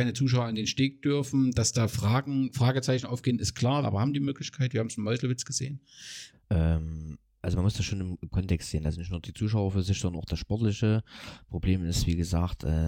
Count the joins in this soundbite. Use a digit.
2